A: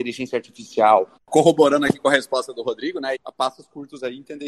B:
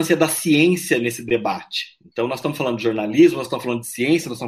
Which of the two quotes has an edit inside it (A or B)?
A